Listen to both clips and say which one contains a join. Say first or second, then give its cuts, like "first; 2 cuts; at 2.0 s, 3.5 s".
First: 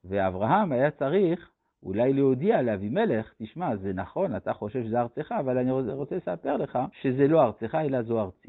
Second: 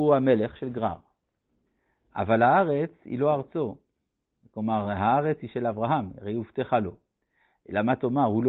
first; 1 cut; at 6.9 s